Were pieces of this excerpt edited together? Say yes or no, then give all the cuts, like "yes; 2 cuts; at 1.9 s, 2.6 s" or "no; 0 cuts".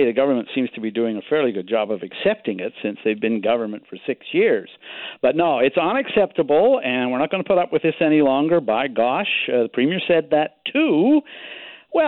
no; 0 cuts